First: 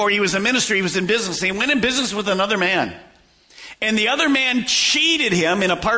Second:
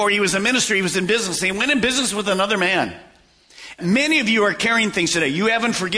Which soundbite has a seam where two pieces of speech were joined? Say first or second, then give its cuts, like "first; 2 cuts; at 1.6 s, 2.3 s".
second; 1 cut; at 3.8 s